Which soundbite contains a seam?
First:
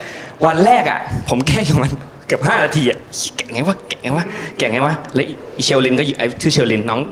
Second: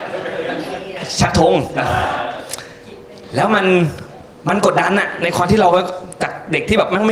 second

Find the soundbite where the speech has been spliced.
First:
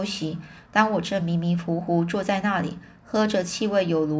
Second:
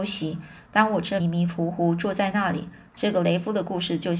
second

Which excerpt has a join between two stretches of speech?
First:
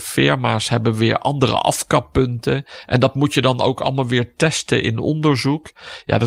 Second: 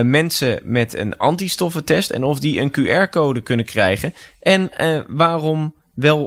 second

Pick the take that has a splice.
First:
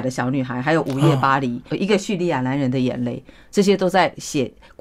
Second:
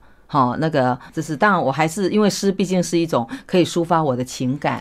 first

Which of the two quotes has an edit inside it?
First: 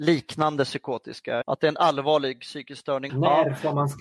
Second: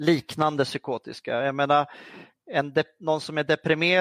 first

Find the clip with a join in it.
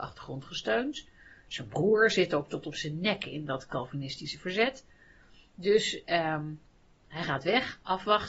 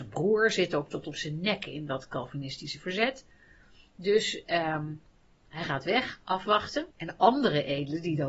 second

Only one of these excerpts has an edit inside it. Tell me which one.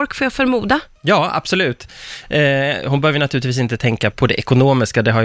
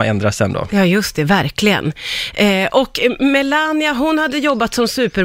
first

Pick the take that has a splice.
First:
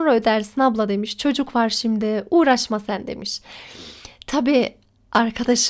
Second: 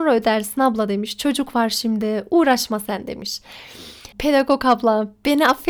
second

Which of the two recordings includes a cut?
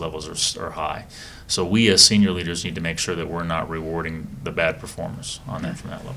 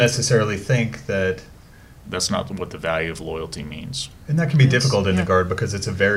second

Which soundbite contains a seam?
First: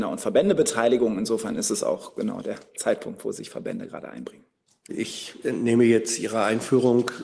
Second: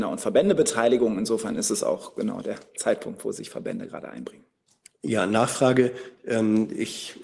first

